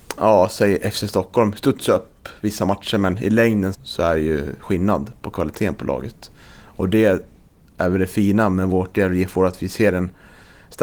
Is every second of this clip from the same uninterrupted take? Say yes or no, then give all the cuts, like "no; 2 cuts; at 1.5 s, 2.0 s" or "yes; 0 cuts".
no; 1 cut; at 3.7 s